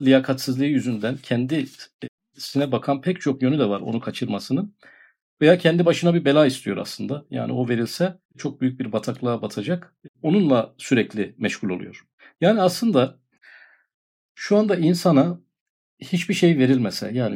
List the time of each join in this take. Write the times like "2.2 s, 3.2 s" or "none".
none